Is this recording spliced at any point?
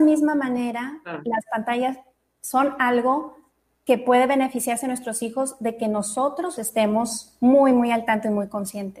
yes; 1 cut; at 6.6 s

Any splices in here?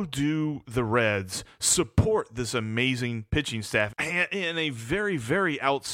yes; 1 cut; at 3.9 s

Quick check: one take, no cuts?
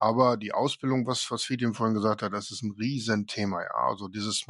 yes; 0 cuts

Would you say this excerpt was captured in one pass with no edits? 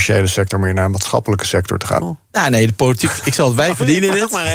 no; 1 cut; at 2.0 s

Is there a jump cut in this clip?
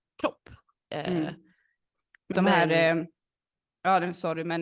yes; 1 cut; at 2.3 s

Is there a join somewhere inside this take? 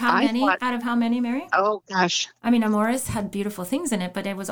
yes; 1 cut; at 2.4 s

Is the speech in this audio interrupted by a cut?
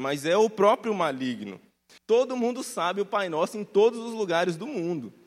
yes; 1 cut; at 2.0 s

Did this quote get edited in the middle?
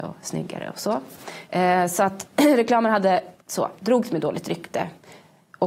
yes; 2 cuts; at 1.5 s, 3.4 s

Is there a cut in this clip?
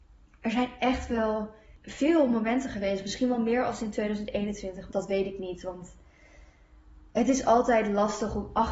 yes; 1 cut; at 4.9 s

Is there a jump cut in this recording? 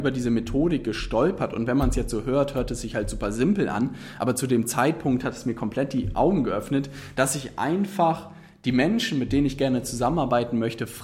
no; 0 cuts

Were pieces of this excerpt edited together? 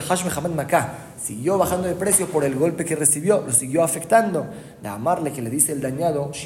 no; 0 cuts

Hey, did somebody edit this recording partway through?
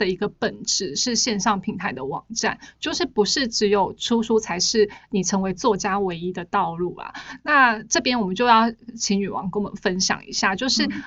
no; 0 cuts

